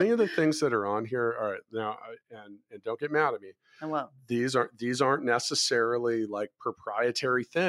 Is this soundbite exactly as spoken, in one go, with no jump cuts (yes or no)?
yes